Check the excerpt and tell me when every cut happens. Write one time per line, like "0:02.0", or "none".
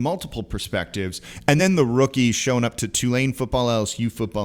none